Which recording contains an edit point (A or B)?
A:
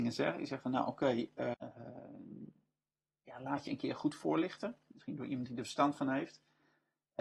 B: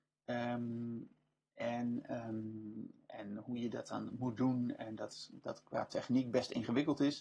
A